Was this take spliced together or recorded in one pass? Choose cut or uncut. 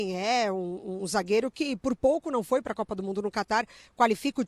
uncut